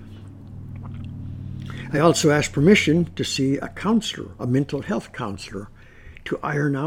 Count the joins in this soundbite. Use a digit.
0